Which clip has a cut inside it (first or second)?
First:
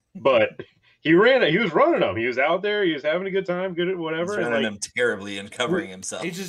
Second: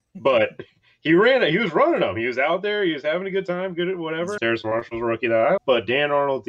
second